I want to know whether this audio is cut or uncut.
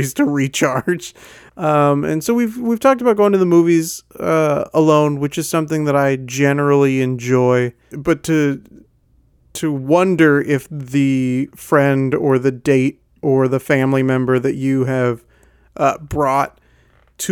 cut